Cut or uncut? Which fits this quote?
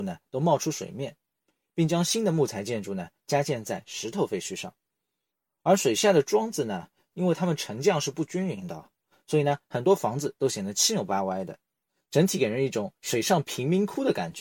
uncut